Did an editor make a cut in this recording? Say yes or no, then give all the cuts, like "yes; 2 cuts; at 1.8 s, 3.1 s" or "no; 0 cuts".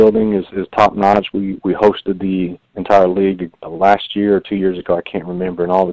no; 0 cuts